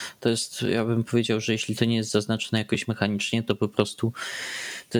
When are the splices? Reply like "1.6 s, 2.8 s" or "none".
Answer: none